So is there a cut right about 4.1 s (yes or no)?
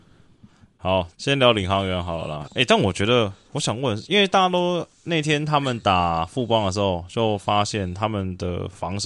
no